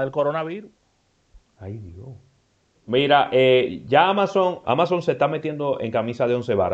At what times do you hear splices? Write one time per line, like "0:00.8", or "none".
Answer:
0:02.8
0:04.6